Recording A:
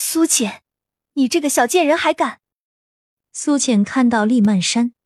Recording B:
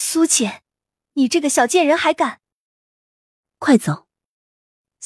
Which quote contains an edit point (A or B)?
A